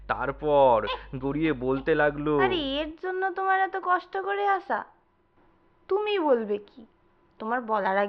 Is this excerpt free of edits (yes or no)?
no